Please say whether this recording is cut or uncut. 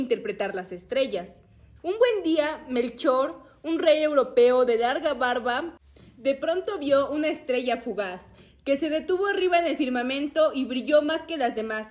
cut